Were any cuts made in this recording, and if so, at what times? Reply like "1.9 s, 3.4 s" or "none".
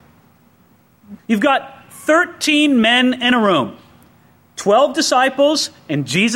1.2 s